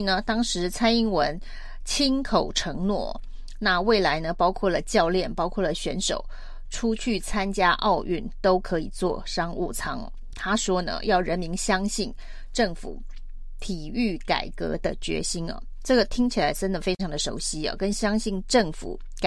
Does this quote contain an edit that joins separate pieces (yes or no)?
no